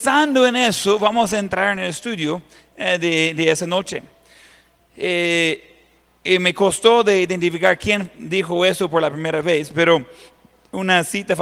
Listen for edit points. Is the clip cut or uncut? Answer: uncut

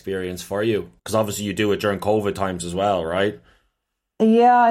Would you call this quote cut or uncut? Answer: cut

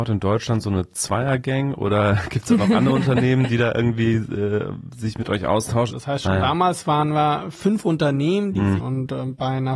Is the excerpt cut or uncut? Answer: cut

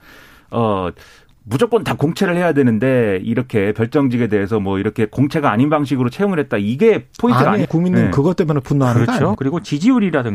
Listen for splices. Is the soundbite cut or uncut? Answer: cut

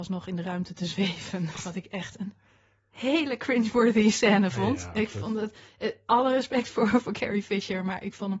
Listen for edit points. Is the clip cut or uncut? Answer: uncut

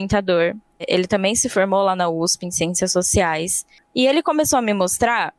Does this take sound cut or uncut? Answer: uncut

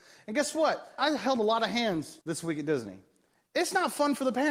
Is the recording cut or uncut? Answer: cut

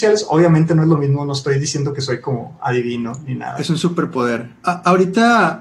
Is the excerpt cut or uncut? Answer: cut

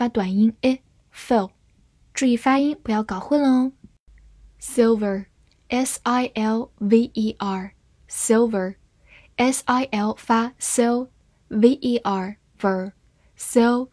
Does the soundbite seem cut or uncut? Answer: uncut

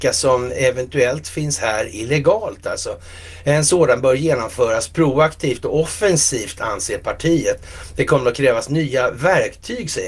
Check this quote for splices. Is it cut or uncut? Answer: uncut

